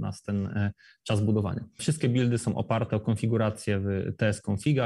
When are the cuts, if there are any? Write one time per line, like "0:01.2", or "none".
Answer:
0:01.8